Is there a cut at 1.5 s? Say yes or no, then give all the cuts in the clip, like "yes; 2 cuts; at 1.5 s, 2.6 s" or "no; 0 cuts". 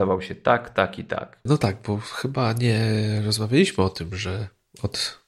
yes; 1 cut; at 1.5 s